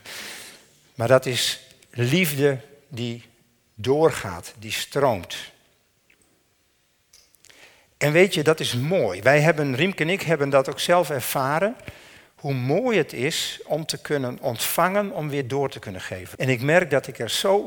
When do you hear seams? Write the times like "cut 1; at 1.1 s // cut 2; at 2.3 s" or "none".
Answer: cut 1; at 16.3 s